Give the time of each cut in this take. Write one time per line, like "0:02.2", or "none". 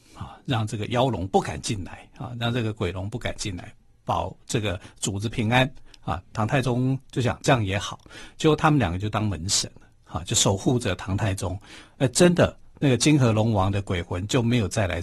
none

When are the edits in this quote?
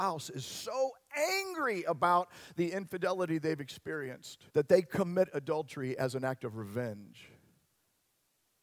0:04.5

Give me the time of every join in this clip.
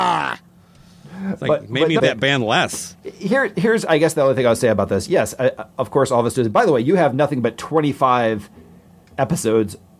0:02.0

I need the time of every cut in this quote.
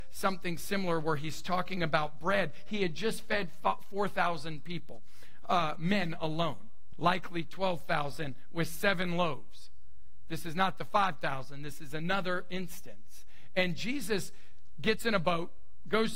0:06.9

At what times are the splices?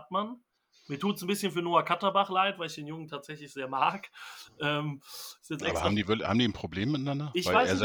none

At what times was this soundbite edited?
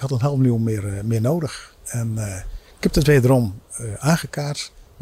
none

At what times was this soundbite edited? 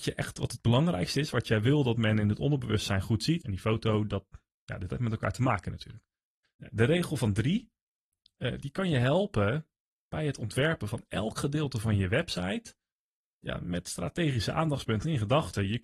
0:03.4

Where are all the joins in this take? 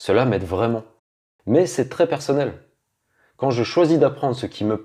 0:01.4

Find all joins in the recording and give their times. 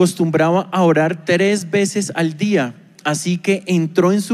none

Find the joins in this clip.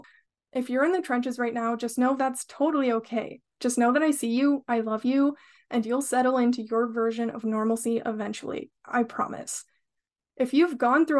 none

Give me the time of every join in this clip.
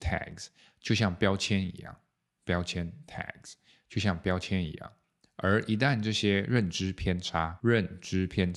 none

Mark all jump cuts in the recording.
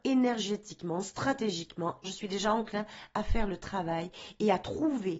0:02.0

